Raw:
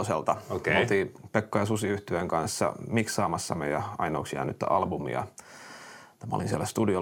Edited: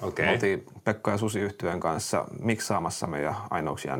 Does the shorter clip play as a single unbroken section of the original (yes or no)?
yes